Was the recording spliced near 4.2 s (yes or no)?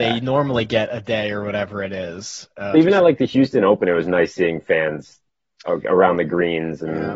no